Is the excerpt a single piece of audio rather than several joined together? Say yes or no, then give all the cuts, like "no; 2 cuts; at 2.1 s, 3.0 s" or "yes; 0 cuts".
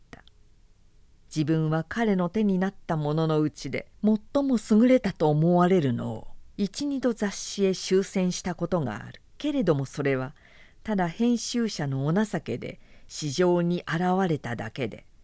no; 1 cut; at 9.3 s